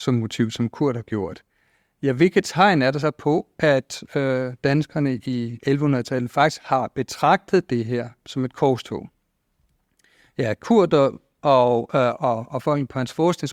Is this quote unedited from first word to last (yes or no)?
no